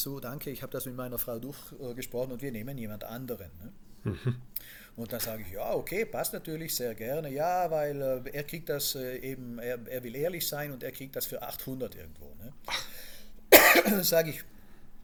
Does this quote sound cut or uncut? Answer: uncut